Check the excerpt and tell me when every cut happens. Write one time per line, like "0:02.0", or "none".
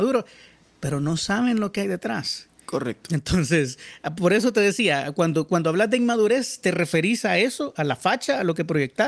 none